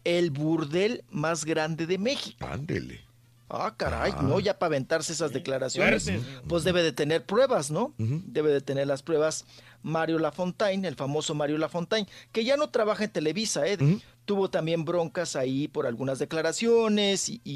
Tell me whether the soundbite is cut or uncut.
cut